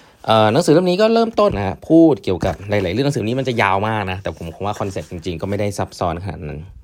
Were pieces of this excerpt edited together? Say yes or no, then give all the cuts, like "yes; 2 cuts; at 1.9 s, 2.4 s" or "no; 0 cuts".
yes; 1 cut; at 1.5 s